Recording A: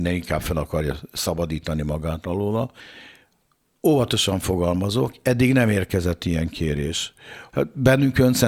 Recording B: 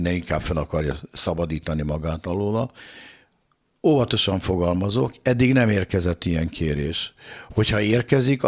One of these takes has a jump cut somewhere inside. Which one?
A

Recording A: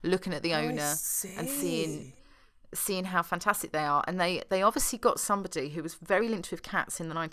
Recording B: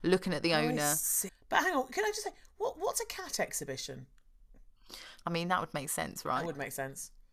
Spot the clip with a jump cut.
B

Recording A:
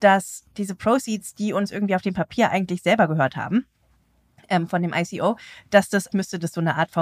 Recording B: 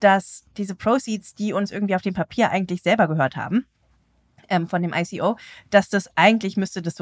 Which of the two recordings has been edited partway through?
A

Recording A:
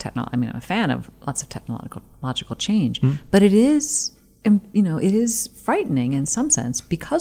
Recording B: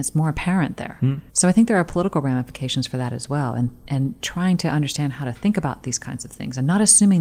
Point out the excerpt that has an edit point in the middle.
B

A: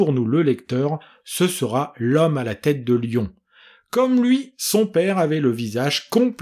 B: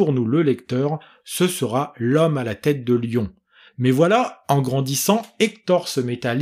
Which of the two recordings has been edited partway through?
B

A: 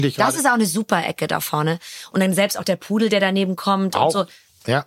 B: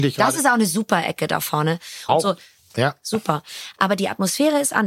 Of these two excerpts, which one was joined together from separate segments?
B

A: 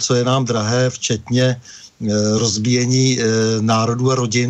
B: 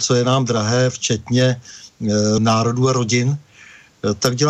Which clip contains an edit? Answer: B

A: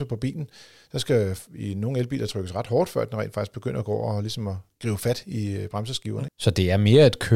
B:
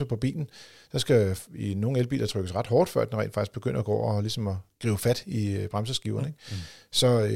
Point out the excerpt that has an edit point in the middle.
A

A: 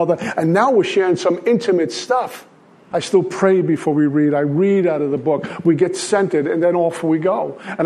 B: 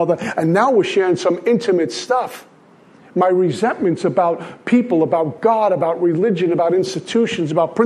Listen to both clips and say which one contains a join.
A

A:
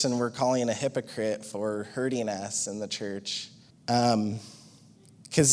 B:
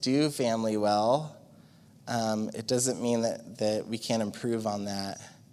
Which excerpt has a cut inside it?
A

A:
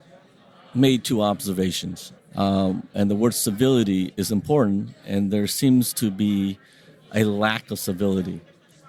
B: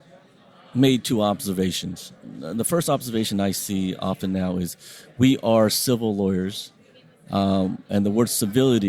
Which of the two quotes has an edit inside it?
A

